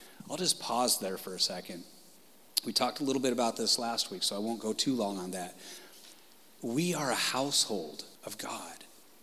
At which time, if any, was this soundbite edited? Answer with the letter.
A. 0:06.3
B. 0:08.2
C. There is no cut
B